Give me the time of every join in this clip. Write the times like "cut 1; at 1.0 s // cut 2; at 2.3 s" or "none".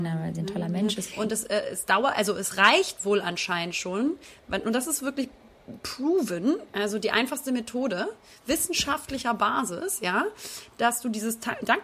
cut 1; at 1.1 s